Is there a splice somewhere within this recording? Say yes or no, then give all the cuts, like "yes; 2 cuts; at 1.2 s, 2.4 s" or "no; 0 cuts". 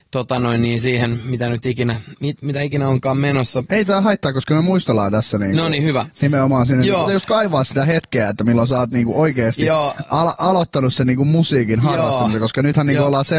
yes; 3 cuts; at 2.1 s, 3.7 s, 7.0 s